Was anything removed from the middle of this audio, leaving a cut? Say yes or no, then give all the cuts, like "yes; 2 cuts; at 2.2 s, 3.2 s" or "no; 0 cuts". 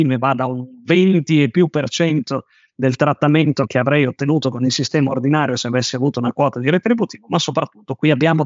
yes; 1 cut; at 3.7 s